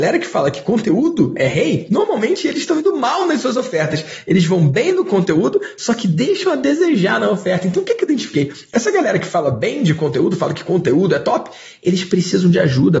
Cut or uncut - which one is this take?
uncut